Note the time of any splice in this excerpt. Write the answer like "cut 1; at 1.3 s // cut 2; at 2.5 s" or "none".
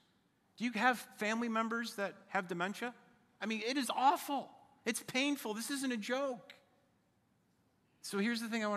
cut 1; at 3.4 s